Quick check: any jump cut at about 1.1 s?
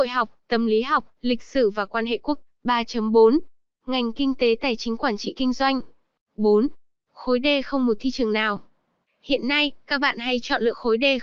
no; 1 cut; at 6.2 s

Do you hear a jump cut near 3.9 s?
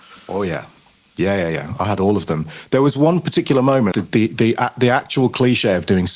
yes; 1 cut; at 3.9 s

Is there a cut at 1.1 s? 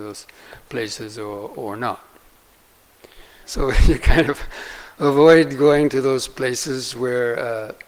no; 1 cut; at 3.4 s

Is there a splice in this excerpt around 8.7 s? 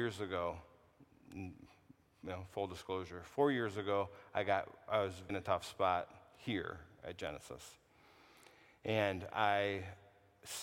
no; 1 cut; at 5.3 s

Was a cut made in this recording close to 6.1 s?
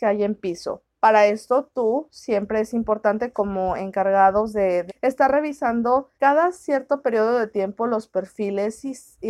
yes; 2 cuts; at 4.9 s, 6.1 s

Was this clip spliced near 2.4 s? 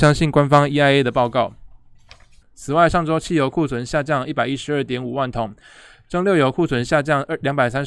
yes; 1 cut; at 2.4 s

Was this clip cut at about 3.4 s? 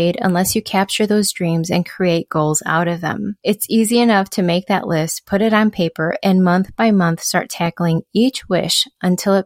no; 0 cuts

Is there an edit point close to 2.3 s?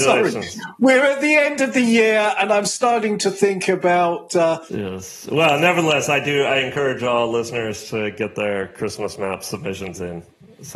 no; 1 cut; at 4.7 s

